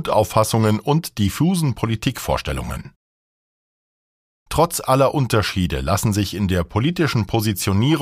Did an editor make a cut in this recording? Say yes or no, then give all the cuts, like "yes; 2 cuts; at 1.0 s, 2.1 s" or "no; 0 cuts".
no; 0 cuts